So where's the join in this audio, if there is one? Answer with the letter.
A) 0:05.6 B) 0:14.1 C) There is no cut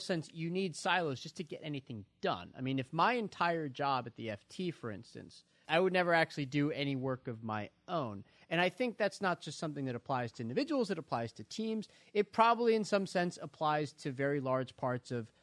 A